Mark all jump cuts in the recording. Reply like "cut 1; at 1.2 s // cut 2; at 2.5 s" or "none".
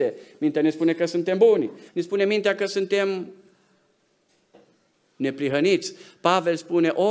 cut 1; at 1.9 s

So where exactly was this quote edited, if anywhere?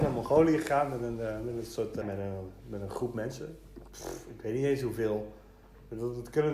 cut 1; at 2.0 s

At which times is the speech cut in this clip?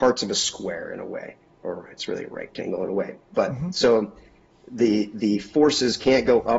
none

